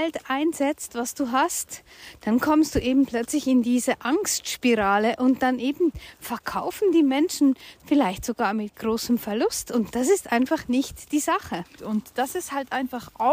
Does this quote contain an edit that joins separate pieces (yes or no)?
yes